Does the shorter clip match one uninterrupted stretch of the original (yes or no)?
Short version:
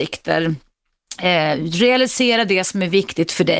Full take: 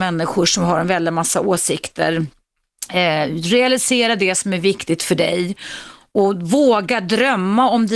yes